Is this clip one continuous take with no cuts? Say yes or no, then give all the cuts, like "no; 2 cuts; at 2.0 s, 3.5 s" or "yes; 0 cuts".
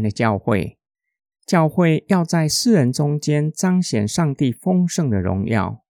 yes; 0 cuts